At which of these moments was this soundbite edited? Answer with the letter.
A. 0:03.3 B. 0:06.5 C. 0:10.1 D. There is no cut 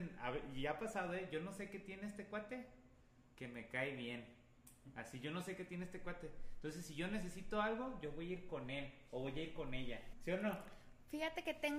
C